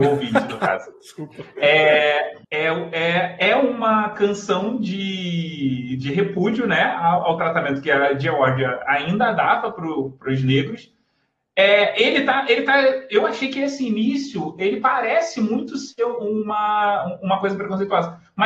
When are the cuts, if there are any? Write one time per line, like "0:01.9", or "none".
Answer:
0:02.4